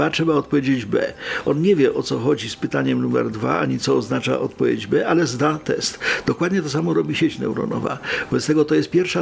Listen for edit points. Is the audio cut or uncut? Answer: uncut